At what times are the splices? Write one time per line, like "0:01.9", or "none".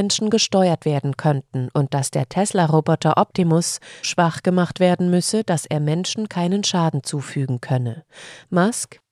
0:04.0